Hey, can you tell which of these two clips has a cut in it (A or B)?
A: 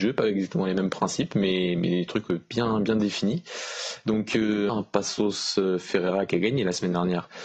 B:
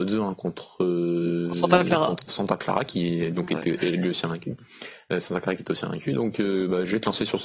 A